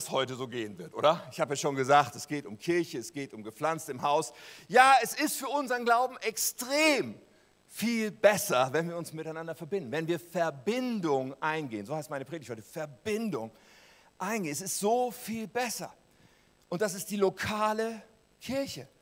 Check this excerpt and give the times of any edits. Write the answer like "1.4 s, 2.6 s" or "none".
none